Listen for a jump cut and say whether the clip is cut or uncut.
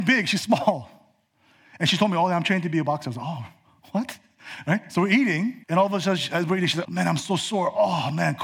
cut